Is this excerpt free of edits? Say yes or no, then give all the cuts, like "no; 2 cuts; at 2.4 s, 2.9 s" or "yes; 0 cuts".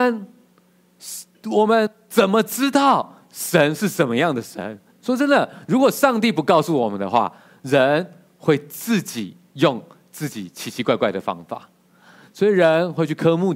no; 1 cut; at 4.9 s